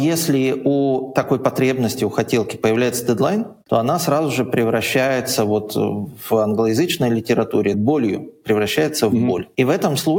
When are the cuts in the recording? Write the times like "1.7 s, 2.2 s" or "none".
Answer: 7.7 s